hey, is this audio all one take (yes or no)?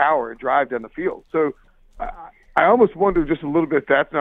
yes